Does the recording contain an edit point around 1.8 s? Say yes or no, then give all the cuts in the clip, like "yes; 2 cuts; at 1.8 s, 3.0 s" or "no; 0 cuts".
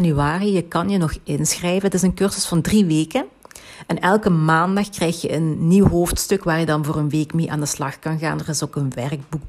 no; 0 cuts